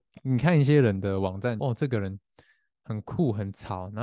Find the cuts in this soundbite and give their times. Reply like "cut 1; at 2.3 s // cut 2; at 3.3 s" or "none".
cut 1; at 1.6 s